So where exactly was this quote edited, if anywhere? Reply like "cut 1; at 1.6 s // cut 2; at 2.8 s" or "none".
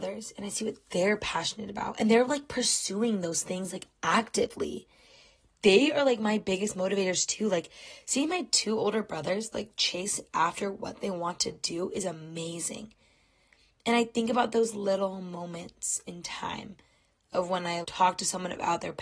cut 1; at 17.8 s